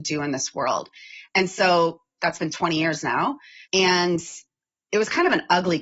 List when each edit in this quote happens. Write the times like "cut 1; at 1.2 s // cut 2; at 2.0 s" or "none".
cut 1; at 2.2 s // cut 2; at 3.6 s